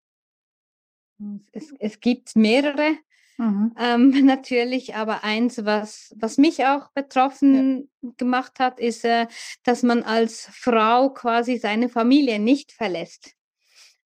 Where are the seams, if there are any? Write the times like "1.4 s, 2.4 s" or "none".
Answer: none